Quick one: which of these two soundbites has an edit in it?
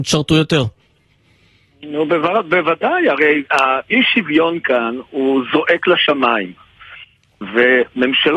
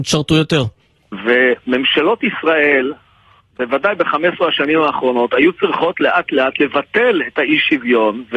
second; 1 cut; at 1.0 s

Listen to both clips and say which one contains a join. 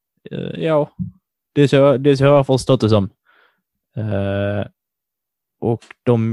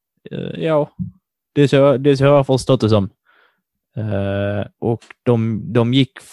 second; 1 cut; at 4.7 s

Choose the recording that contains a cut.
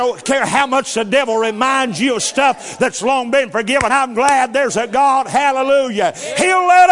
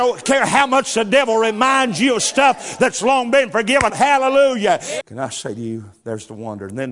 second; 2 cuts; at 3.9 s, 5.0 s

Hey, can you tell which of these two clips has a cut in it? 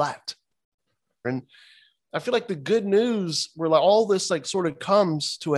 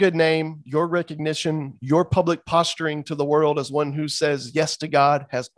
first; 1 cut; at 1.2 s

